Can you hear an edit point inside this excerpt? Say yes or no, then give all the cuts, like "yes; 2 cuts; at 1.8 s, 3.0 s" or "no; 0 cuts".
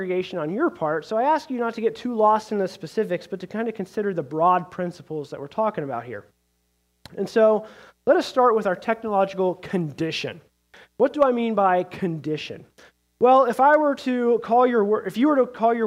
no; 0 cuts